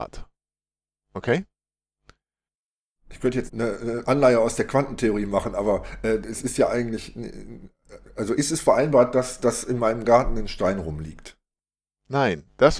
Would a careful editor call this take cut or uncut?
cut